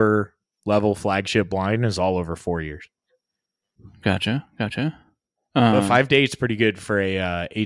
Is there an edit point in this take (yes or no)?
no